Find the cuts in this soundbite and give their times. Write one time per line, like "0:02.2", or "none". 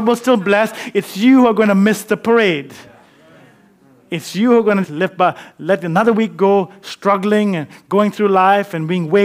0:04.8